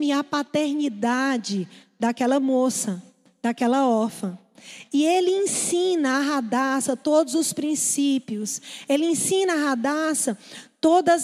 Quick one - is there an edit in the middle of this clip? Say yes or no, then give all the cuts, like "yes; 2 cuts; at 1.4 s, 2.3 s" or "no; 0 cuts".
no; 0 cuts